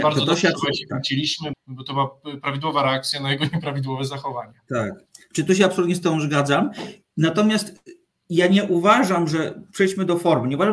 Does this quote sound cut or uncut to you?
cut